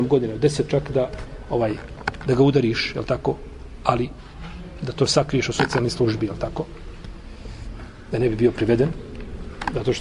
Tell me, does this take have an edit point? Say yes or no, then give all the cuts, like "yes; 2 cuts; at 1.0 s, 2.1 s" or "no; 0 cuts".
no; 0 cuts